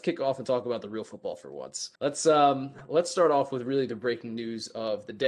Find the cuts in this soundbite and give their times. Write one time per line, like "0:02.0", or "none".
0:02.0